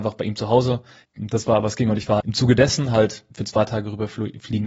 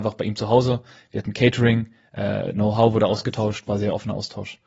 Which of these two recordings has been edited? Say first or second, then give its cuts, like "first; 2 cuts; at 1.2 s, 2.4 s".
first; 3 cuts; at 1.0 s, 2.2 s, 3.3 s